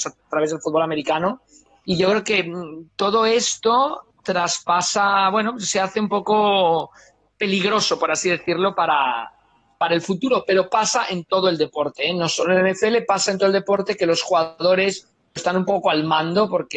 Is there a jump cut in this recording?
no; 0 cuts

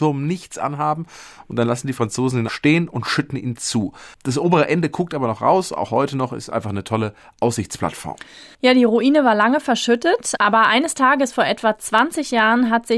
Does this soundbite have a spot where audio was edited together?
yes; 1 cut; at 2.5 s

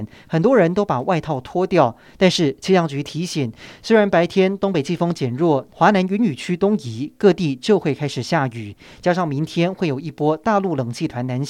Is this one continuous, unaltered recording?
no; 1 cut; at 5.7 s

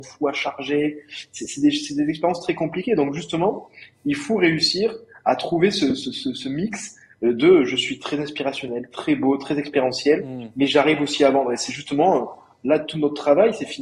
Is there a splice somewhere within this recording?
no; 0 cuts

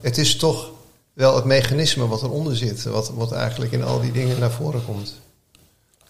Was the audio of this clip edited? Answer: no; 0 cuts

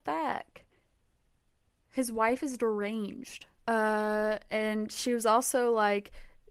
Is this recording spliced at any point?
yes; 1 cut; at 3.6 s

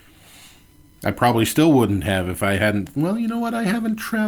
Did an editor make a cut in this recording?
no; 0 cuts

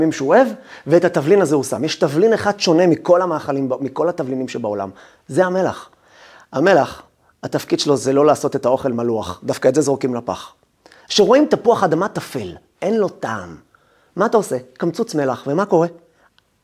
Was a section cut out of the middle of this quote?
no; 0 cuts

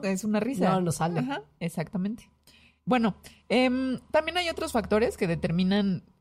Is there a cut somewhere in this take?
no; 0 cuts

